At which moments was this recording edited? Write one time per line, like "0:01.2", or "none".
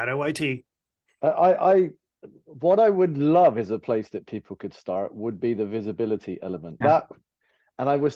0:06.8